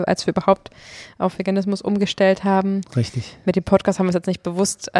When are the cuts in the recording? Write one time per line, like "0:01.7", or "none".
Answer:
none